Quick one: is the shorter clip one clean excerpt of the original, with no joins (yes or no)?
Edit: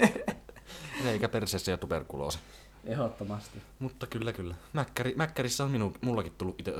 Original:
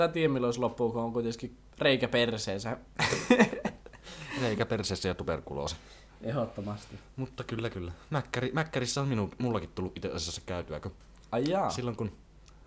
yes